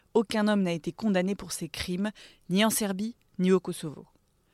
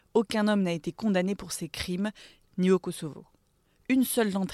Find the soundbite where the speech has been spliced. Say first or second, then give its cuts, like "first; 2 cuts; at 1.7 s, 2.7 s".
second; 1 cut; at 2.4 s